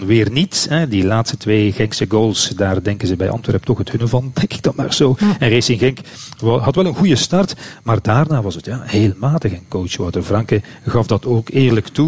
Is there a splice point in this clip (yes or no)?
no